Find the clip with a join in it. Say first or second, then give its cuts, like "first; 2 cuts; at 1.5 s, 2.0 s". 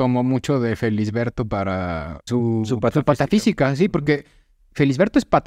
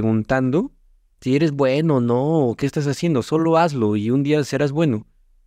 first; 1 cut; at 2.3 s